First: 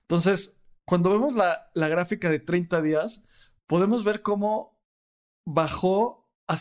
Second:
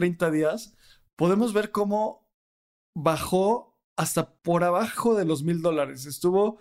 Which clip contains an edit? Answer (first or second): second